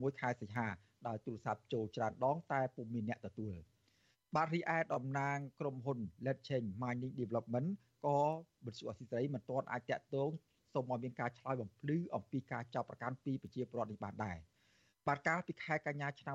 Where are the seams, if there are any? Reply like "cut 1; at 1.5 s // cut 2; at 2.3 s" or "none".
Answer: none